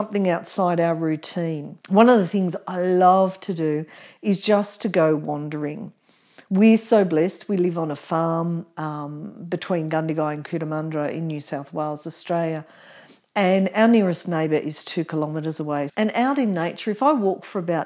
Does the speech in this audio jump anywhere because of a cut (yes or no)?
yes